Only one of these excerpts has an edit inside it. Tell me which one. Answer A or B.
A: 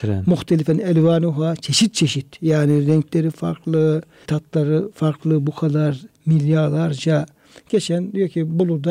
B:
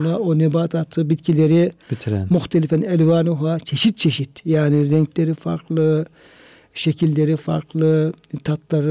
A